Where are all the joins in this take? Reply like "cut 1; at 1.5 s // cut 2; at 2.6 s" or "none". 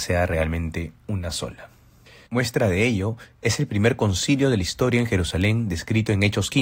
cut 1; at 2.3 s